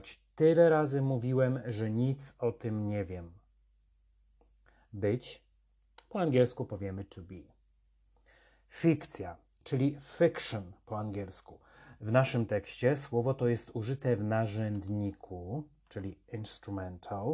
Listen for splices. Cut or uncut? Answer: uncut